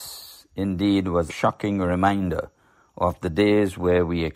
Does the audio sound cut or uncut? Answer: cut